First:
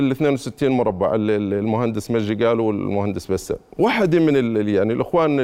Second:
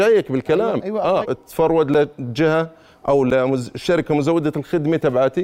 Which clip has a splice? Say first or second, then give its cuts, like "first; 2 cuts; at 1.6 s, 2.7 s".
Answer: second; 1 cut; at 1.2 s